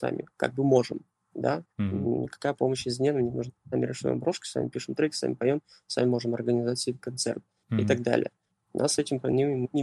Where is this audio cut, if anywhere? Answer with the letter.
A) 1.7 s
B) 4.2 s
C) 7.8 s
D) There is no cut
A